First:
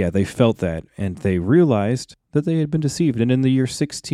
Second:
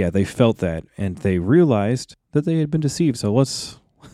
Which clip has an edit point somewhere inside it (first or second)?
second